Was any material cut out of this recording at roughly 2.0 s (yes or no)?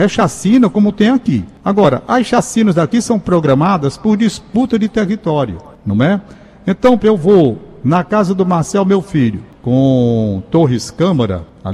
no